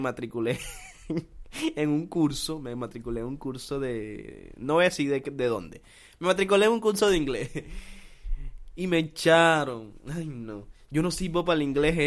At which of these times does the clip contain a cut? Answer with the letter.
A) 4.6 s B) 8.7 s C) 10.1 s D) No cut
D